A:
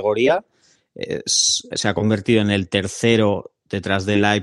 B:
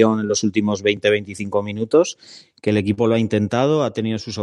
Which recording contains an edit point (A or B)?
A